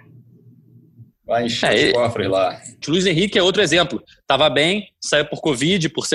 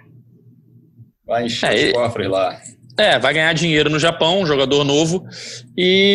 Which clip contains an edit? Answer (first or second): first